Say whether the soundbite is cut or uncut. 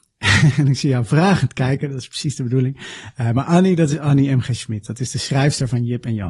uncut